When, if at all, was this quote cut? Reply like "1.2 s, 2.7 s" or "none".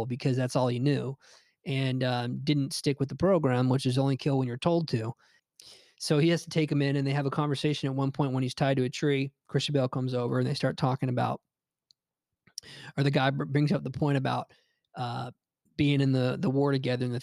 5.4 s